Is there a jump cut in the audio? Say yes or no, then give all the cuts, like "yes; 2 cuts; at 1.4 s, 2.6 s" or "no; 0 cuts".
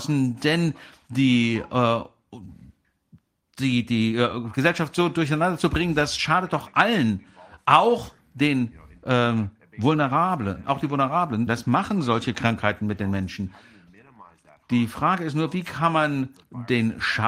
yes; 1 cut; at 11.5 s